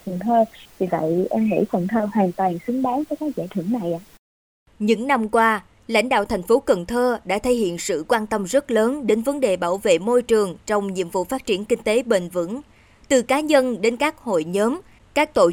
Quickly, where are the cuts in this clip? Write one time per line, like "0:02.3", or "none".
none

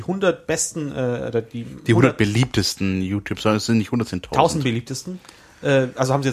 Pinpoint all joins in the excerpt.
none

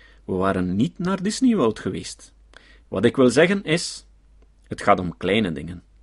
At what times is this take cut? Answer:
0:02.8

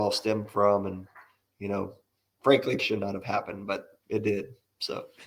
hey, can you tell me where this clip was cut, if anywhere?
0:02.8
0:04.0

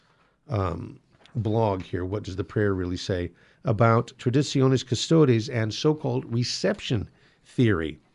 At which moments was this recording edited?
0:04.2

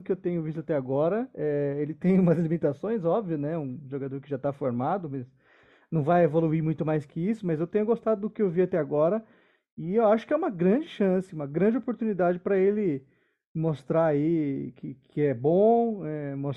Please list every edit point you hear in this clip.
none

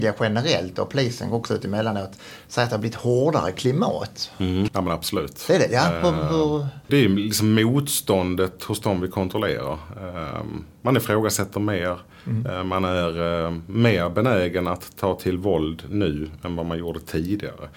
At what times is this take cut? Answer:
0:04.7
0:06.8

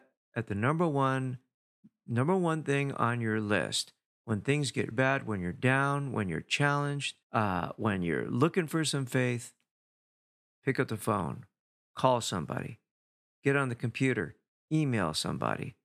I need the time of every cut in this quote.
0:04.9
0:07.2

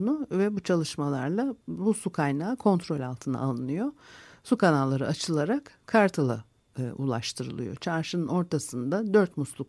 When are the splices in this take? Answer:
none

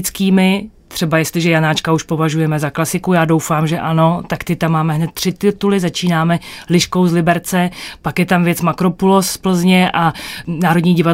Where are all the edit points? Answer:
none

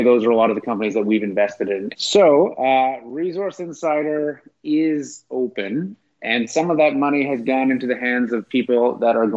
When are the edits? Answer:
0:01.9
0:06.0

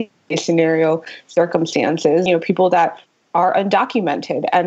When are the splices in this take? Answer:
0:02.3

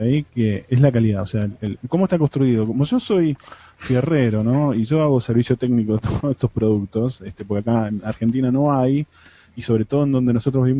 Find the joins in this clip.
0:01.8

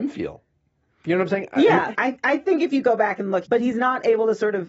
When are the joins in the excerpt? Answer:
0:01.9
0:03.5

